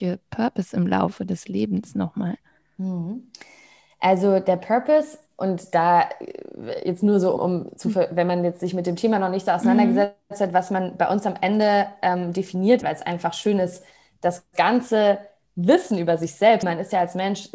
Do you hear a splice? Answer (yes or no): yes